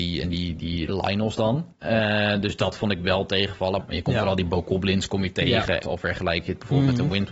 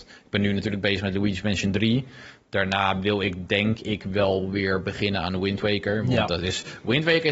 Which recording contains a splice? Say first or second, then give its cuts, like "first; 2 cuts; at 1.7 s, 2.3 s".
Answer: first; 3 cuts; at 1.7 s, 3.8 s, 5.8 s